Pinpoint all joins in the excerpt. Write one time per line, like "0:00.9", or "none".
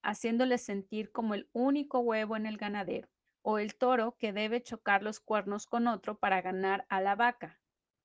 0:03.3